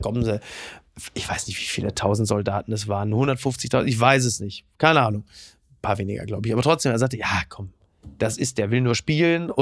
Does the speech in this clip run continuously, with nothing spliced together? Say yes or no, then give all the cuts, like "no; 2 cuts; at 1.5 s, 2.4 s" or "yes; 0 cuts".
yes; 0 cuts